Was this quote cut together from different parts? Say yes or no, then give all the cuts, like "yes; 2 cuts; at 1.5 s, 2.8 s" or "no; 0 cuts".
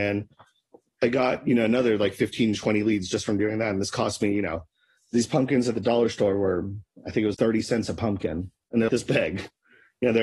yes; 2 cuts; at 7.3 s, 8.9 s